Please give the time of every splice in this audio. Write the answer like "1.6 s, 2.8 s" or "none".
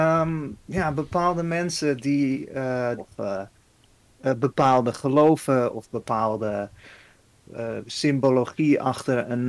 3.0 s